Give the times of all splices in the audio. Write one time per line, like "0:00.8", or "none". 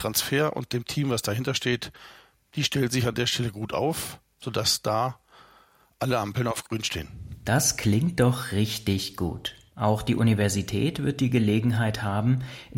0:09.7